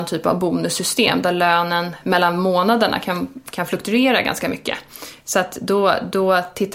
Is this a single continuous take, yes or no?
yes